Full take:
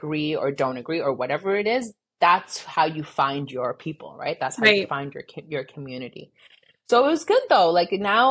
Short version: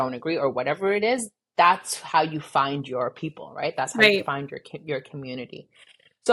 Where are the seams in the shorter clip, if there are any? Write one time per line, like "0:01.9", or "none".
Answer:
none